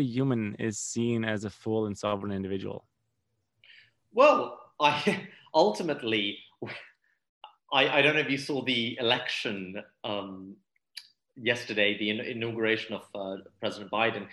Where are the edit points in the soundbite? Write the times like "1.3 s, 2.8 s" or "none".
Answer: none